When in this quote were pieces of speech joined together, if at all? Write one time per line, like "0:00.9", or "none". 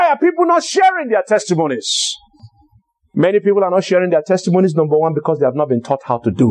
none